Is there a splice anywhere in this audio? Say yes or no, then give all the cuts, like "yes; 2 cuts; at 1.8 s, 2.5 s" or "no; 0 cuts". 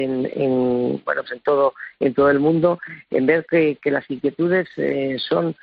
yes; 1 cut; at 1.3 s